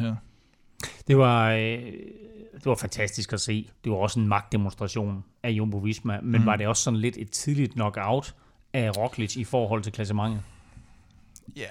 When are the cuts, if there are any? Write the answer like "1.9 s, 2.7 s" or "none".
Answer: none